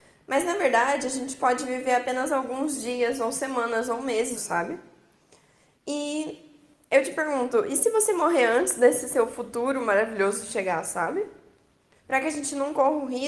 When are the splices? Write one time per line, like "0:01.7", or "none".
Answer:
0:04.3
0:12.0